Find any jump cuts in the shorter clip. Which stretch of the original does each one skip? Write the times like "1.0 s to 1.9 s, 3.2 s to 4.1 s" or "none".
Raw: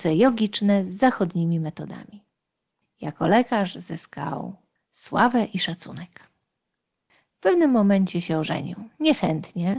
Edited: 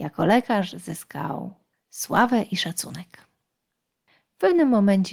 none